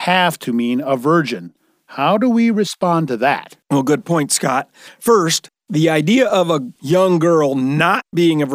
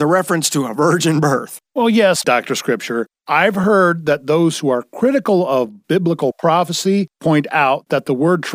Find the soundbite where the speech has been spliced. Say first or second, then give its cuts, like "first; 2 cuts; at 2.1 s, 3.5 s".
second; 1 cut; at 2.2 s